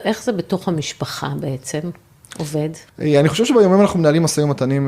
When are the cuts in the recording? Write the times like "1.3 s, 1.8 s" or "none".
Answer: 2.9 s